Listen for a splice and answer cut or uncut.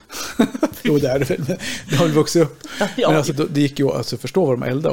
cut